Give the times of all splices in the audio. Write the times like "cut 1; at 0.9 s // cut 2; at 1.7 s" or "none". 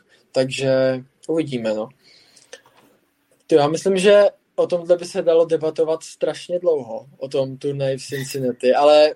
none